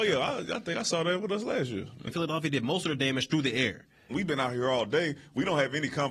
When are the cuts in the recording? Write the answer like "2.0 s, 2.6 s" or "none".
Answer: 2.1 s, 4.1 s